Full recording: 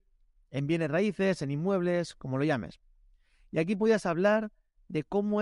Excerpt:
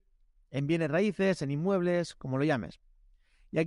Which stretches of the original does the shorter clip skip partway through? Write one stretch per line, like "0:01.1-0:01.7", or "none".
none